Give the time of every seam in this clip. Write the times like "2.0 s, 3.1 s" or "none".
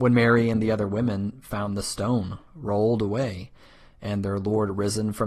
none